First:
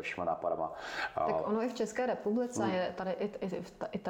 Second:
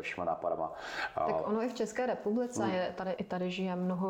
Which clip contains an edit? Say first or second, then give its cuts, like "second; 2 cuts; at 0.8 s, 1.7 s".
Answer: second; 1 cut; at 3.2 s